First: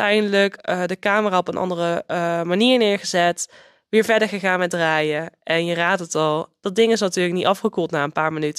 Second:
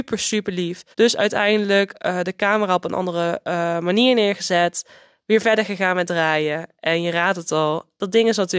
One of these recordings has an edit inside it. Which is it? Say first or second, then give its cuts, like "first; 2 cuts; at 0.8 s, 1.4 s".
second; 1 cut; at 0.9 s